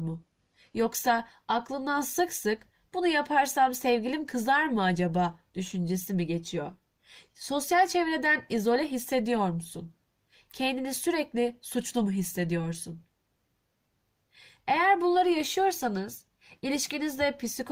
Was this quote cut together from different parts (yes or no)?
yes